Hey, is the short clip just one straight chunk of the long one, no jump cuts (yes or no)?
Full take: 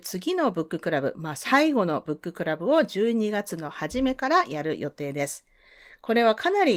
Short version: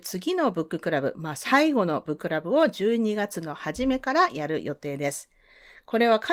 no